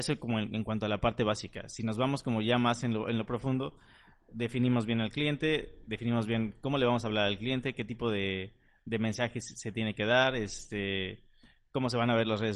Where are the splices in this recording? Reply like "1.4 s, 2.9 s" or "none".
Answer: none